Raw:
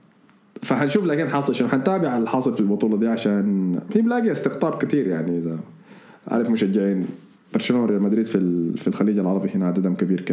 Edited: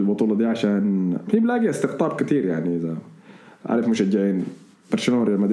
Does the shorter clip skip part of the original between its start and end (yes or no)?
no